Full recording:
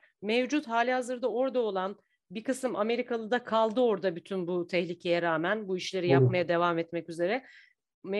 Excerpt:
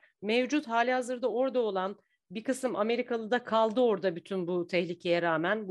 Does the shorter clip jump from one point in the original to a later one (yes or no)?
no